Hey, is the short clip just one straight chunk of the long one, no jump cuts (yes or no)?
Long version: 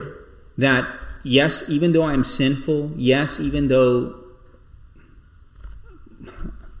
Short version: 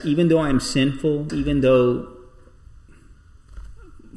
no